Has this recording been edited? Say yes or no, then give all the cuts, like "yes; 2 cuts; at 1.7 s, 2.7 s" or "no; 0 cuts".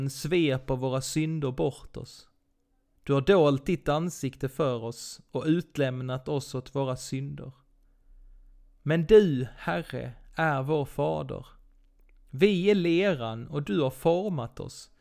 yes; 1 cut; at 3.0 s